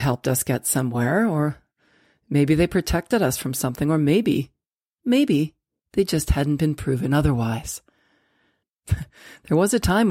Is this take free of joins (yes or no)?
no